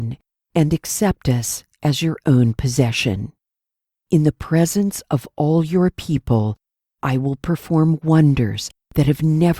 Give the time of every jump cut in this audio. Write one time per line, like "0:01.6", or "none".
0:03.9

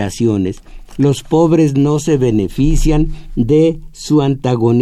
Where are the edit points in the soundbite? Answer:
none

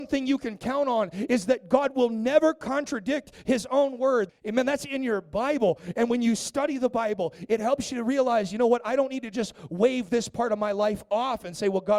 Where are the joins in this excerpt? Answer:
0:04.3

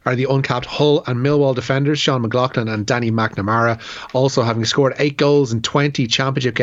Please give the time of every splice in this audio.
none

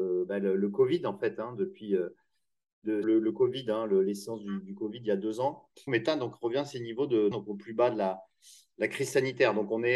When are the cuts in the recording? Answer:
0:03.0
0:05.9
0:07.3

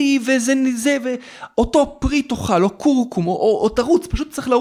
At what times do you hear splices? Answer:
none

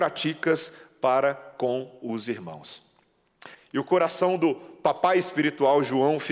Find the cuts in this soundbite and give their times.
0:03.5

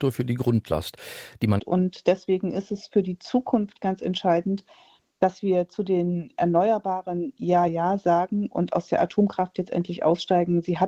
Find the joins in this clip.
0:01.6
0:07.7

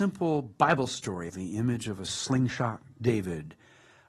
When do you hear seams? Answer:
0:01.3

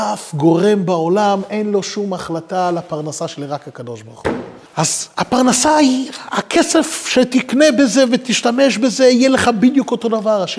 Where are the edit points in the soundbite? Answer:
0:04.7

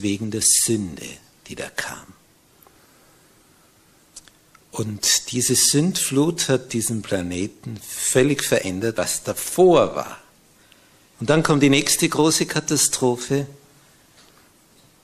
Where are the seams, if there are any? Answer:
0:08.9
0:11.1

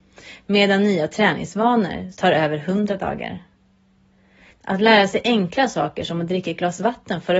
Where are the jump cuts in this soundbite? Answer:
0:02.1
0:04.5

